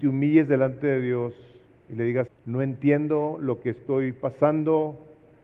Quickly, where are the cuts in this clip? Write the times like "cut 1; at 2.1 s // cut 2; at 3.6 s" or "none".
cut 1; at 2.3 s

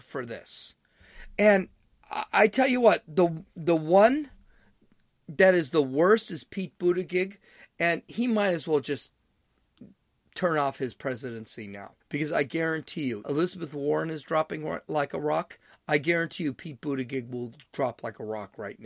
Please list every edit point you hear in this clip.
cut 1; at 12.0 s // cut 2; at 13.2 s

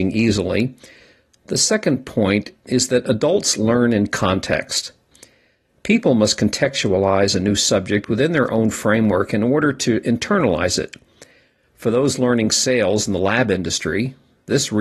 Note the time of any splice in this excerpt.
none

